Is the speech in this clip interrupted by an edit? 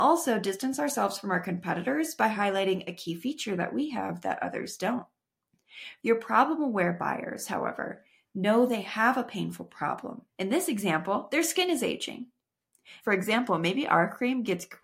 yes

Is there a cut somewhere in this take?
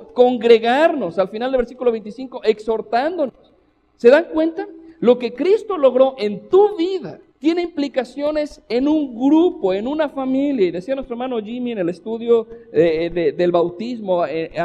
yes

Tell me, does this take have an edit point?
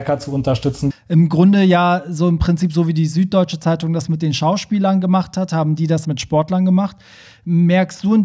yes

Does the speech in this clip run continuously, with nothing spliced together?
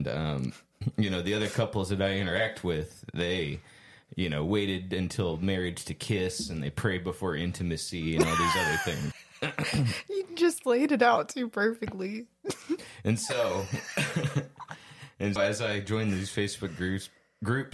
no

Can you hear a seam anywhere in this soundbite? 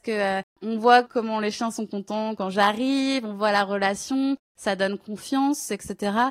no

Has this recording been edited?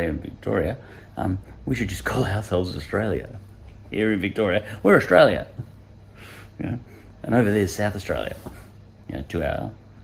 no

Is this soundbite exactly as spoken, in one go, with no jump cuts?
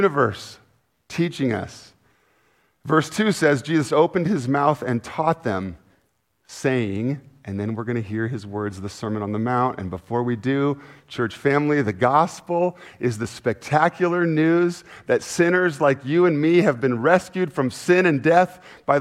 yes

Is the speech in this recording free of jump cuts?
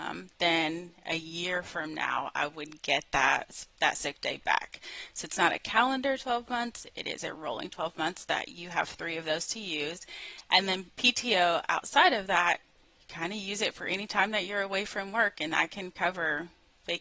yes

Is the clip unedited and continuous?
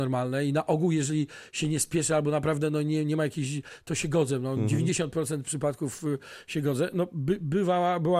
yes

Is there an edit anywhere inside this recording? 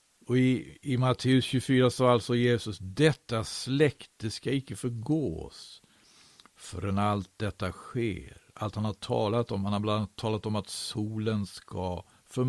no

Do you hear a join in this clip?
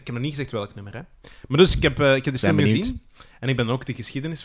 no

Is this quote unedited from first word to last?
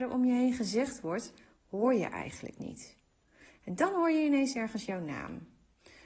yes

